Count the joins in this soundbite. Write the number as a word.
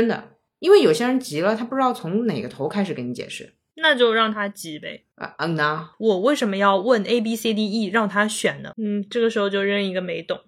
two